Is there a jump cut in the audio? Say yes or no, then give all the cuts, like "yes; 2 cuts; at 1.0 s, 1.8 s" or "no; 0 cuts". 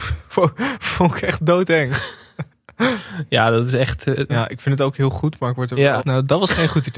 yes; 2 cuts; at 4.3 s, 6.0 s